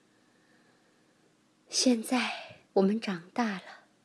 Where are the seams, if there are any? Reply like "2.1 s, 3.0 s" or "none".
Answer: 2.6 s

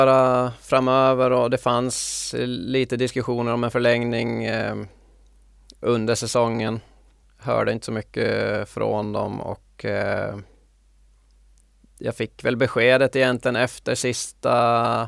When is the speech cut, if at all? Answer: 7.2 s

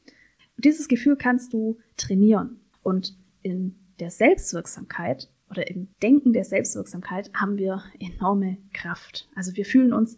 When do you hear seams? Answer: 2.7 s, 5.9 s

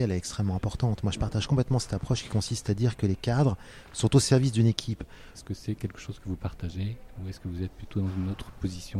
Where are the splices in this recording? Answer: 5.3 s

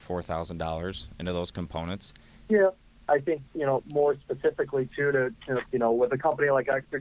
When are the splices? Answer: 2.5 s, 5.7 s

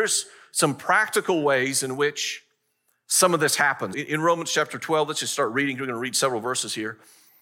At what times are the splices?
3.9 s

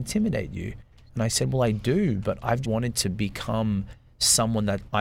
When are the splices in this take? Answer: 1.1 s, 2.6 s

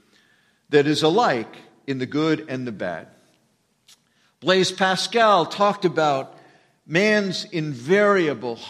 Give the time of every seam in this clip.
none

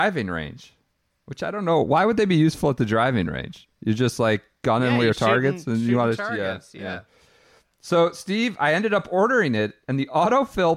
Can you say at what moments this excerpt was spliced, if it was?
none

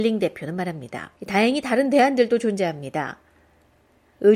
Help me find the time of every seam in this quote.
1.2 s

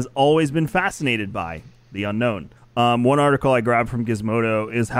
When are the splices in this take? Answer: 2.6 s

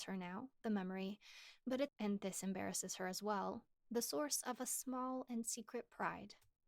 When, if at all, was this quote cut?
1.9 s

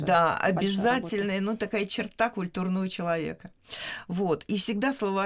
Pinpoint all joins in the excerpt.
none

